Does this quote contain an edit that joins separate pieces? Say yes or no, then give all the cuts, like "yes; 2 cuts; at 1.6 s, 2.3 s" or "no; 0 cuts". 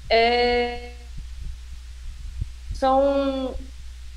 no; 0 cuts